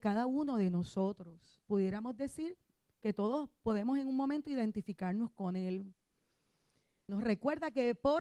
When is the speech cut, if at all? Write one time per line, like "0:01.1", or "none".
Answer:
0:01.6
0:07.1